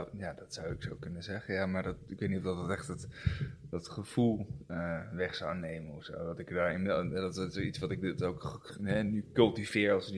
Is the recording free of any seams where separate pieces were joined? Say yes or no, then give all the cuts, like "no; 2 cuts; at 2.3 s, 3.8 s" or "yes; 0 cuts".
yes; 0 cuts